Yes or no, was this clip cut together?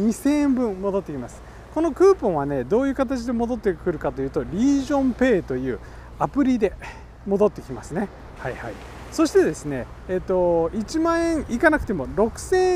yes